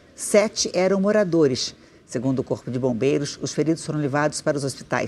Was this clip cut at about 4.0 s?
no; 1 cut; at 1.9 s

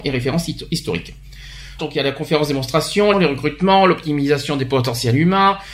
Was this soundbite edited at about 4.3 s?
no; 2 cuts; at 1.8 s, 3.1 s

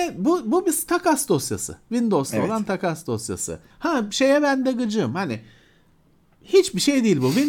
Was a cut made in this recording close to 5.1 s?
no; 1 cut; at 3.7 s

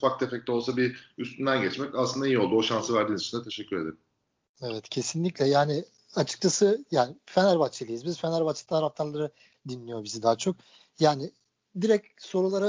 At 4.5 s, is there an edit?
no; 0 cuts

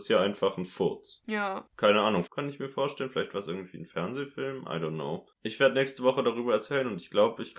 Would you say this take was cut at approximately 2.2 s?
yes; 1 cut; at 2.2 s

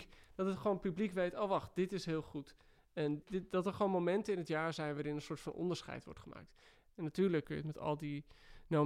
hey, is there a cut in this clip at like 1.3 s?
no; 2 cuts; at 3.2 s, 7.4 s

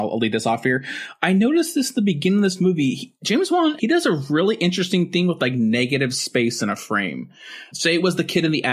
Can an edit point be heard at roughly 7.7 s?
yes; 2 cuts; at 3.8 s, 7.7 s

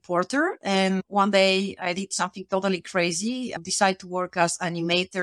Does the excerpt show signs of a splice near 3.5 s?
no; 0 cuts

